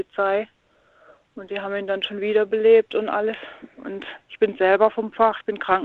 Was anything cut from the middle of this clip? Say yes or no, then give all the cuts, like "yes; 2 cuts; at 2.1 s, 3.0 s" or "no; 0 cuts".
no; 0 cuts